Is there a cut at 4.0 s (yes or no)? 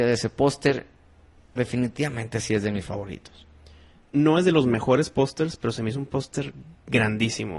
yes